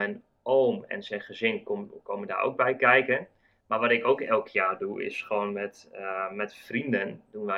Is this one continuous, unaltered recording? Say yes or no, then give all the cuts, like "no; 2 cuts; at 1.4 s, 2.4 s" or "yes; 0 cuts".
yes; 0 cuts